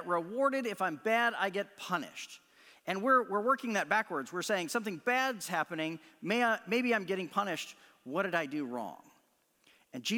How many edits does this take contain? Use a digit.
0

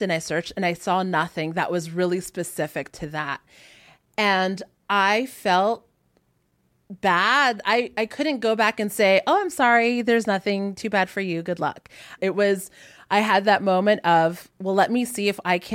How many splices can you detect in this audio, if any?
1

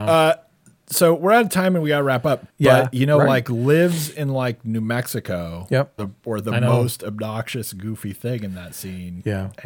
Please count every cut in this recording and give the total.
2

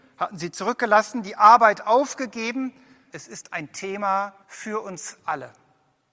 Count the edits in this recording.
2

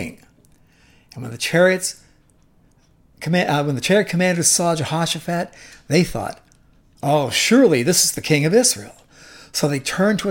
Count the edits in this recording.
0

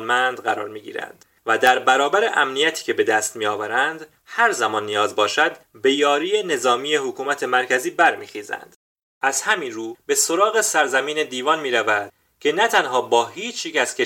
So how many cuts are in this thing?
1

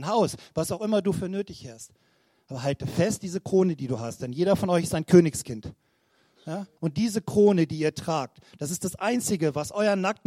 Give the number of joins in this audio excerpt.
1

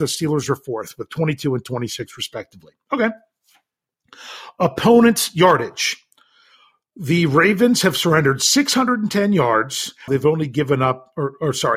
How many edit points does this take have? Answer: 1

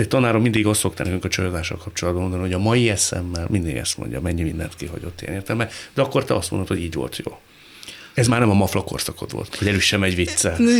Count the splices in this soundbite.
2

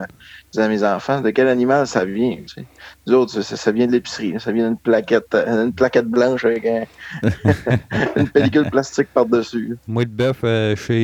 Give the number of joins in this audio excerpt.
2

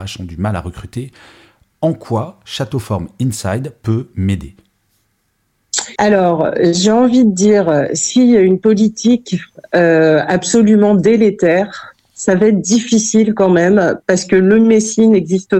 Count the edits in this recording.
1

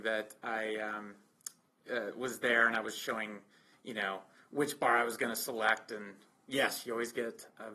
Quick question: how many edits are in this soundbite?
0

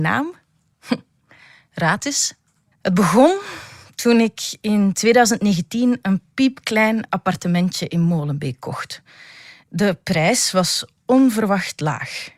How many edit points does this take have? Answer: 1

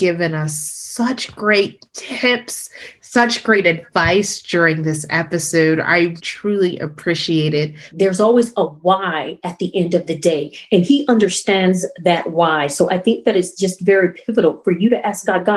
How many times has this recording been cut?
2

